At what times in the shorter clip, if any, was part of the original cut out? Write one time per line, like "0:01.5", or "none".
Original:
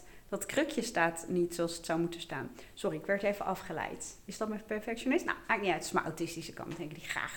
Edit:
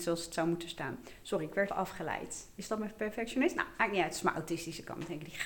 0:01.7

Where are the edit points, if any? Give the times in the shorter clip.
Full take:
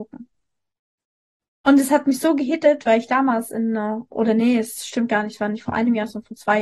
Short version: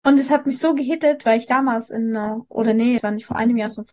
0:03.0

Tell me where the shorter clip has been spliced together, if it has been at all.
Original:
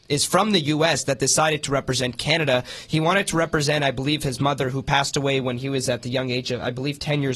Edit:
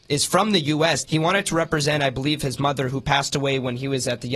0:01.0

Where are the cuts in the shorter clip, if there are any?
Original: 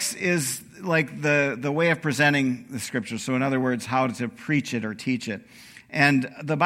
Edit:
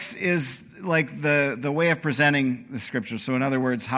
none

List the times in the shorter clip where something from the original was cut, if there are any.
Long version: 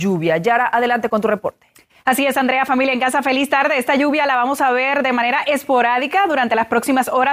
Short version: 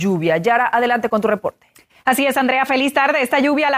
0:02.7

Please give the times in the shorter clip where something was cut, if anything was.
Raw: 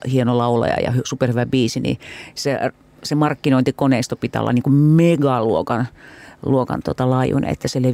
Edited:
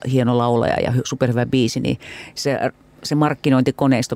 none

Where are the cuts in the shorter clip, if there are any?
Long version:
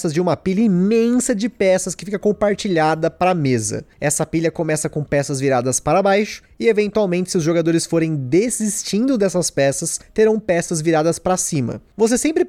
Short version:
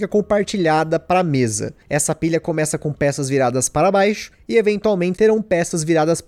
0:05.2

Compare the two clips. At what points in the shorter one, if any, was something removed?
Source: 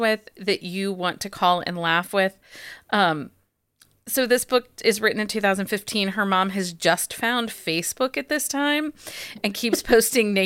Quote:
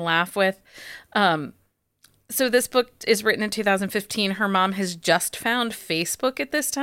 none

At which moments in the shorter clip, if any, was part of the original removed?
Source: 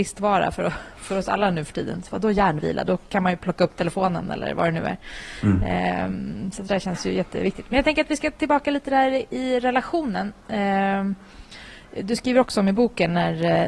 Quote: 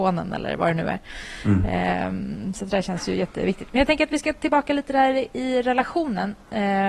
none

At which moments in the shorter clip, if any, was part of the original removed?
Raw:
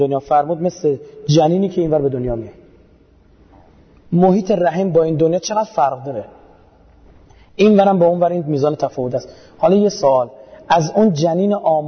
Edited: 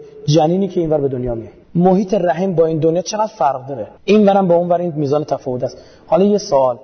0:01.6
0:04.0

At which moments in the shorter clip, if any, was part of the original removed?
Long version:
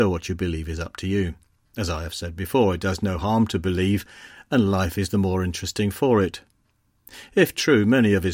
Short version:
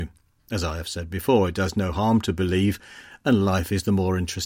none

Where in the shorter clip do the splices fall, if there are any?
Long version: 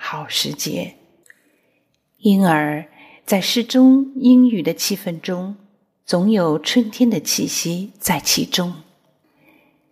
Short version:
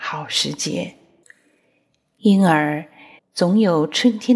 0:03.2

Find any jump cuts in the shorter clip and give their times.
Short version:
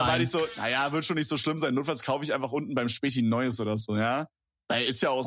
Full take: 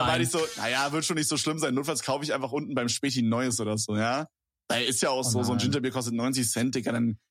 none

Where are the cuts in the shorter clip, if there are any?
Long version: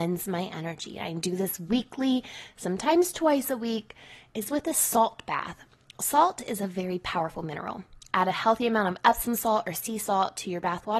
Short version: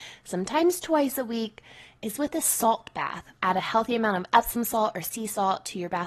0:03.4

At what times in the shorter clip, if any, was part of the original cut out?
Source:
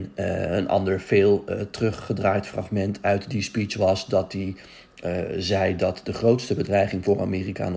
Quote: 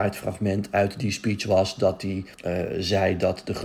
0:02.3

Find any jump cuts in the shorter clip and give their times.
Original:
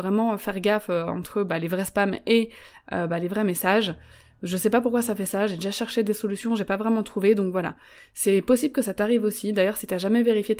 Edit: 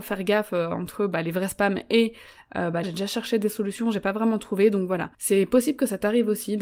0:02.8
0:05.1

